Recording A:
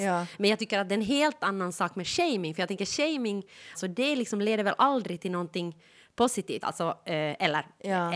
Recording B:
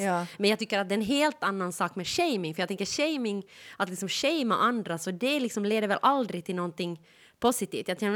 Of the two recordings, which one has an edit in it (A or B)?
A